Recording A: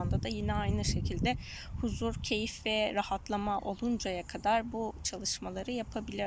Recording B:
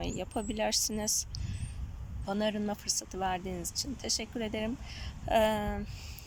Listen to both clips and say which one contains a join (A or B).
B